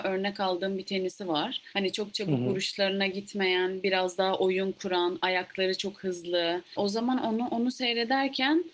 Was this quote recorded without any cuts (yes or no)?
yes